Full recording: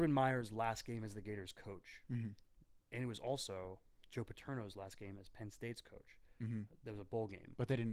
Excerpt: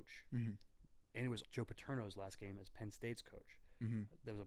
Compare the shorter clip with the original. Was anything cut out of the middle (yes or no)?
yes